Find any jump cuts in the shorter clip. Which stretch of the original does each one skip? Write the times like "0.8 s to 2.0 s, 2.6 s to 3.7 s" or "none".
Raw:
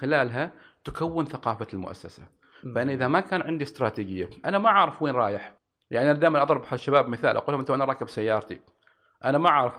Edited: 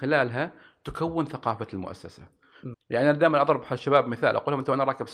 2.7 s to 5.7 s